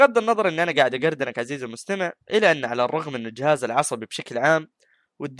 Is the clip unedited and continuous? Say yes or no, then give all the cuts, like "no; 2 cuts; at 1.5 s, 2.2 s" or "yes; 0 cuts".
no; 1 cut; at 2.2 s